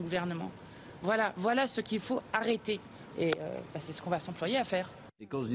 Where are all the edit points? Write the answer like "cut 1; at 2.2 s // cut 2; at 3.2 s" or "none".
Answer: cut 1; at 3.1 s